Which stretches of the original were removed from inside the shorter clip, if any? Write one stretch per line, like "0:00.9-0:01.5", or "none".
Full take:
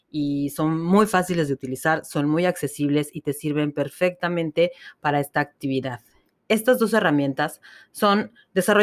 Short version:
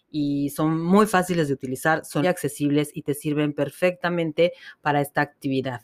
0:02.2-0:02.4